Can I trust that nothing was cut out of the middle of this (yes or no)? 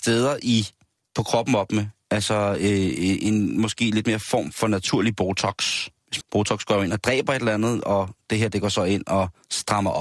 no